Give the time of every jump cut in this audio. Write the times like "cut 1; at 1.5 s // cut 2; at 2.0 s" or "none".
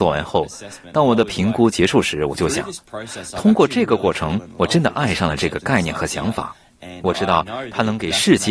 none